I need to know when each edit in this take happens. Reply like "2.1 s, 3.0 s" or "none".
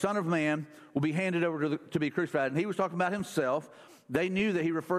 none